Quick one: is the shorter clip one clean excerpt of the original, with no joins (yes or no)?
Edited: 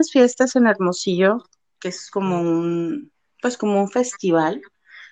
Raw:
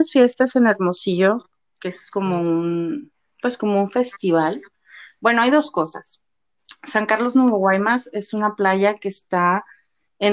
yes